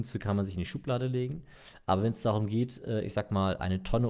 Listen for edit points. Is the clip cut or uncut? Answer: uncut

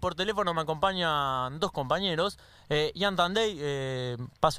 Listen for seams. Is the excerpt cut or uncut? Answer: uncut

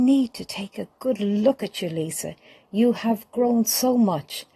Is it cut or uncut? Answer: uncut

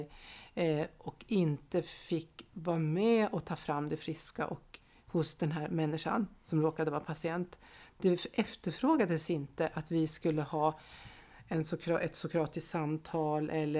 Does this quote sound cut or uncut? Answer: uncut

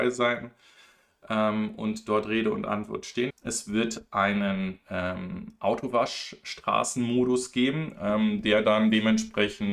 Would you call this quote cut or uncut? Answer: cut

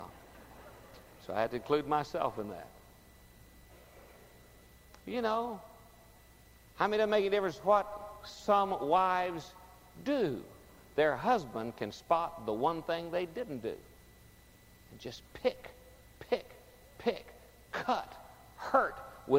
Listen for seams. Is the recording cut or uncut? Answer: cut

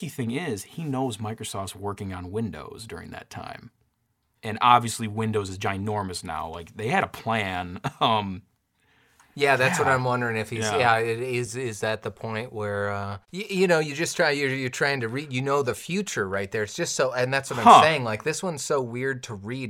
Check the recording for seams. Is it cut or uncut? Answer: uncut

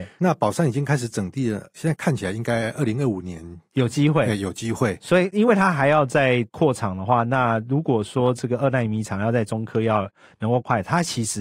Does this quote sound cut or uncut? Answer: uncut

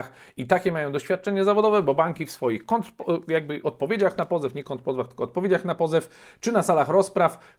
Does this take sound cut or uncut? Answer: uncut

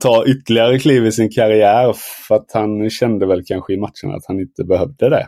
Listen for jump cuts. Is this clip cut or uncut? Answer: uncut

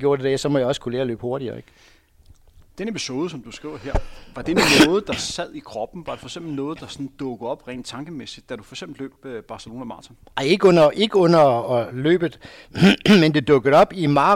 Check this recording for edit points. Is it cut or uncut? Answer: uncut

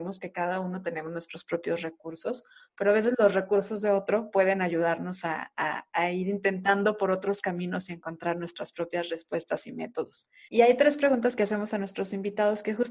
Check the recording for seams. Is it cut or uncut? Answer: cut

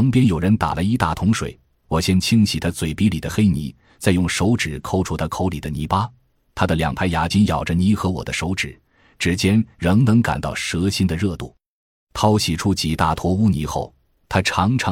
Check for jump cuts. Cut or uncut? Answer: cut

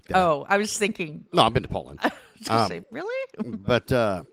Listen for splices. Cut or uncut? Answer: uncut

